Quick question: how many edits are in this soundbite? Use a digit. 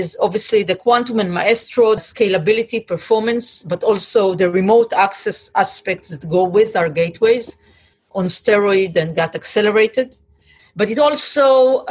3